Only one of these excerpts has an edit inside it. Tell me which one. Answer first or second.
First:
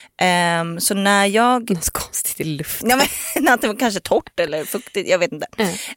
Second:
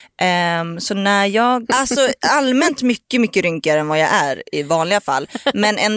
second